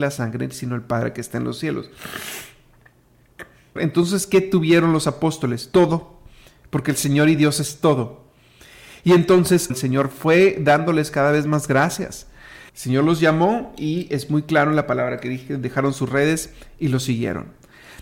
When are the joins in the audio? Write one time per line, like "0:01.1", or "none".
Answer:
0:03.8
0:09.7
0:12.7